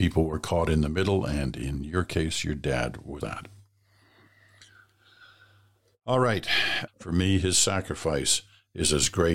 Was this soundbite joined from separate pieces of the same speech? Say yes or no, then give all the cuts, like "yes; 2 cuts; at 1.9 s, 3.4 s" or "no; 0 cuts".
yes; 2 cuts; at 3.2 s, 6.9 s